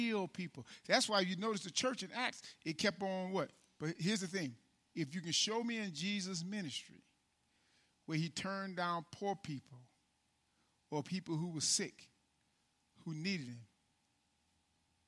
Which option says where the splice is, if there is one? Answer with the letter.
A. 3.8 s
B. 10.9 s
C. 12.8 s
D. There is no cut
A